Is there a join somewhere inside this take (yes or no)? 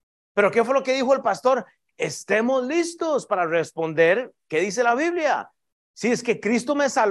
no